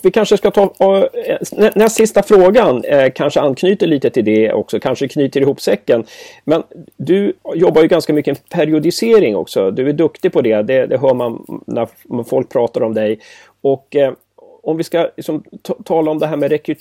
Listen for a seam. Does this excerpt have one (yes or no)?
no